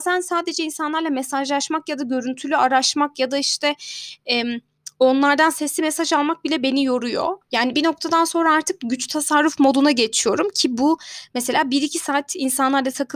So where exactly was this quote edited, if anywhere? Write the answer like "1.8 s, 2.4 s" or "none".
7.4 s